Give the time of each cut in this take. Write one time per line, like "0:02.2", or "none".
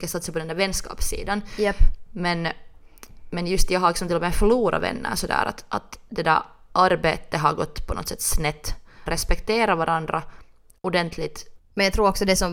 0:09.1
0:11.6